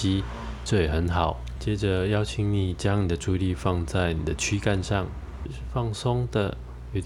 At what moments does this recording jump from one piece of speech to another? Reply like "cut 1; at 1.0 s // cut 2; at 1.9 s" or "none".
cut 1; at 1.6 s // cut 2; at 5.5 s